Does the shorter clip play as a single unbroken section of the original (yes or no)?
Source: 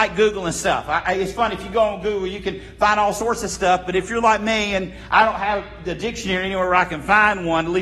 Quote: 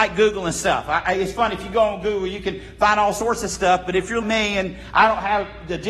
no